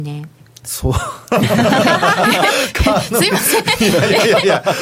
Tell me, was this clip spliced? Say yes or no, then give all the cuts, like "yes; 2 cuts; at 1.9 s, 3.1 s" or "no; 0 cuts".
no; 0 cuts